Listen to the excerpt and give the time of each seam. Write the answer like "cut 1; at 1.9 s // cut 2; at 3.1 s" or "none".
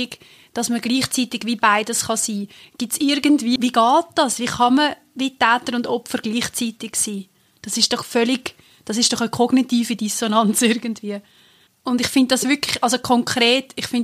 cut 1; at 3.6 s // cut 2; at 11.7 s